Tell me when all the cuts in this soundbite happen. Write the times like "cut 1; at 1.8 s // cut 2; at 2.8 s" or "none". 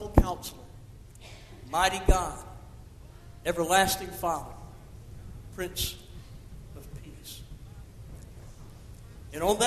none